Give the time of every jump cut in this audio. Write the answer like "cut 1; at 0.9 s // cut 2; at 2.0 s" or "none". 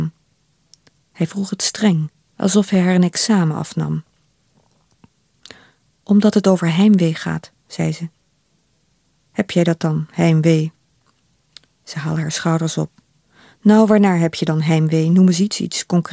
cut 1; at 2.3 s